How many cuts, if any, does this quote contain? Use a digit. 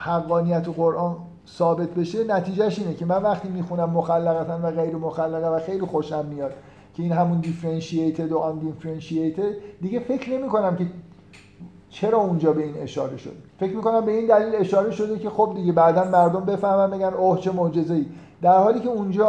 2